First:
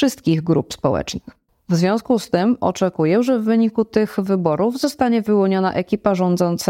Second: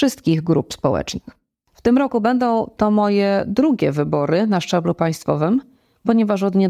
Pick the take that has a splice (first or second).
first